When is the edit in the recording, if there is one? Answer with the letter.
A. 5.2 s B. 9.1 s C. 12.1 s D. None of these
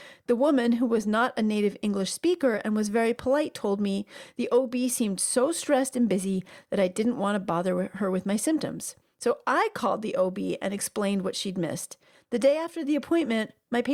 C